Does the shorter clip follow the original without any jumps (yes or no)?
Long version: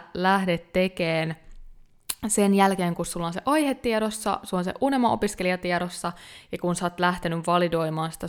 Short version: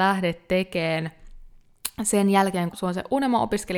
no